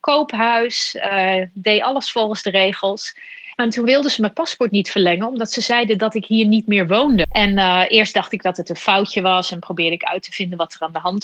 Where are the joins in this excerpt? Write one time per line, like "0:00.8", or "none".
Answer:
0:03.5
0:07.2